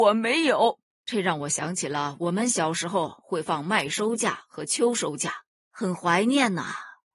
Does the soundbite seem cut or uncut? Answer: cut